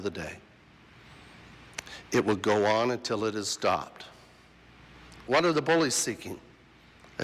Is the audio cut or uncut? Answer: cut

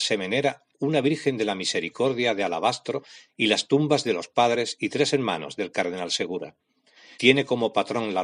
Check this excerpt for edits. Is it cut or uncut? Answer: cut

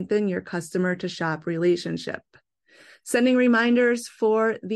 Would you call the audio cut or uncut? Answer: uncut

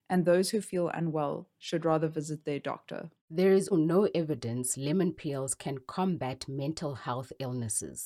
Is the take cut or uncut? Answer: cut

